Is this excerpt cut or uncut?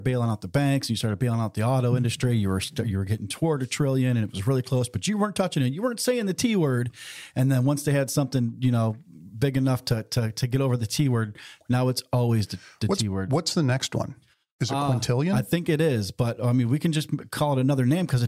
uncut